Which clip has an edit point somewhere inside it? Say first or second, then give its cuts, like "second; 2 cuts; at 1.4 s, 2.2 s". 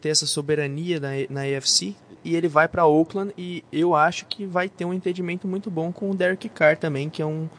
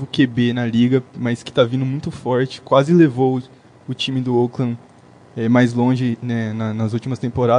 first; 1 cut; at 2.2 s